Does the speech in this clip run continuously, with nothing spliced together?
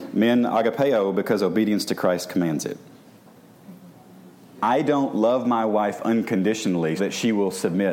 no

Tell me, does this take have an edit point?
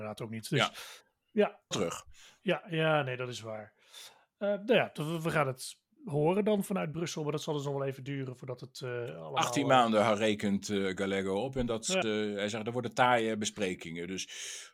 yes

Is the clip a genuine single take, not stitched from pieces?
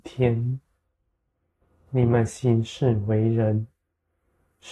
yes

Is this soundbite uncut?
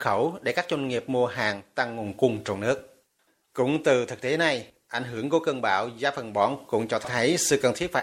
yes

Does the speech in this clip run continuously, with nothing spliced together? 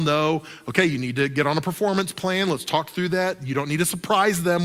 yes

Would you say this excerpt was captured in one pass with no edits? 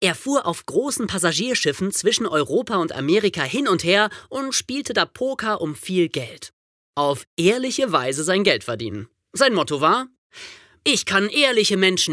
no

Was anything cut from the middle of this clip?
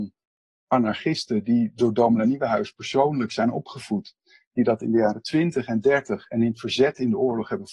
no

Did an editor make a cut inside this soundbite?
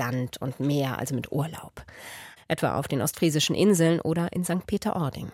yes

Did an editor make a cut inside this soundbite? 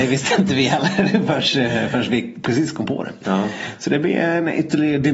no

